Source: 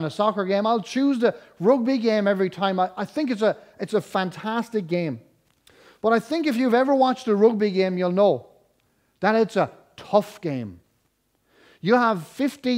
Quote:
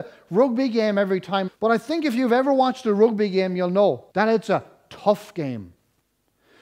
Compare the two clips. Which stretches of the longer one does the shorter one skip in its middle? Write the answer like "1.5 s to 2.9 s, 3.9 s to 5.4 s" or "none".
2.8 s to 5.9 s, 8.5 s to 9.2 s